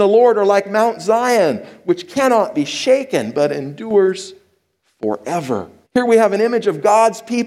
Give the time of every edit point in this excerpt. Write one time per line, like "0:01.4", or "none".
0:05.9